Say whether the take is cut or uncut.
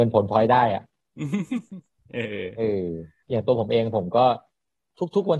uncut